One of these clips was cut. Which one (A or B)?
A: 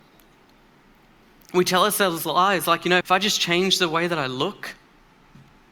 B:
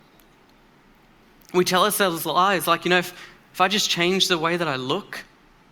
A